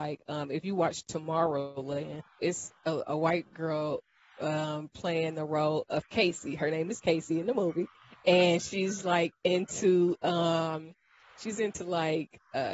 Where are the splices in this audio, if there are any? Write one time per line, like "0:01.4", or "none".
0:02.4